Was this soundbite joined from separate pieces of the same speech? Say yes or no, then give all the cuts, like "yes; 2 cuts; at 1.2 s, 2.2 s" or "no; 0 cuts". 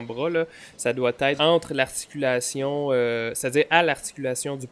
yes; 1 cut; at 1.4 s